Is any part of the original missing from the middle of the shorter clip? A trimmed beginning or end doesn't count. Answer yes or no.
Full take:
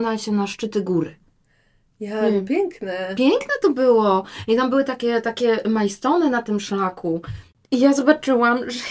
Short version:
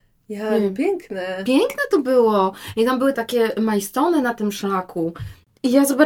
yes